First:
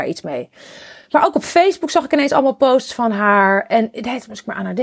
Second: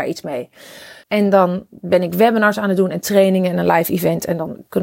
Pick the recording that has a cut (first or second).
second